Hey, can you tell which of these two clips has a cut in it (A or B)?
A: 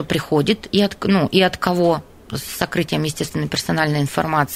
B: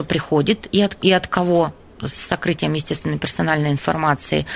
B